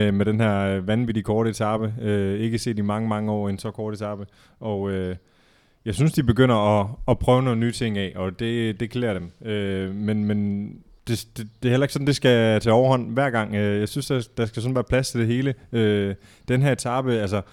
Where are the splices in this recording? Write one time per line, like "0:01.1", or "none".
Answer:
none